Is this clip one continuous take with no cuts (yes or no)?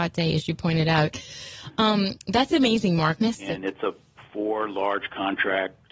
no